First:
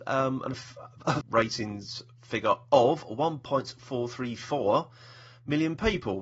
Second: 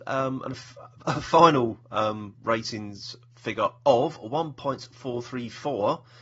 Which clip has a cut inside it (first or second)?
first